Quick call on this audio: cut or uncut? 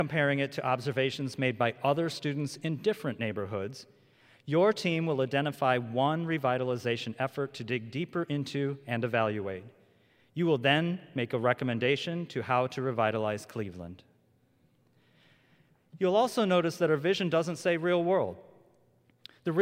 uncut